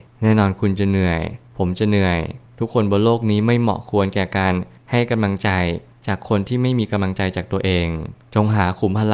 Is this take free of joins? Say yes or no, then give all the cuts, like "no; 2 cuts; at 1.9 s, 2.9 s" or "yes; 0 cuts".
yes; 0 cuts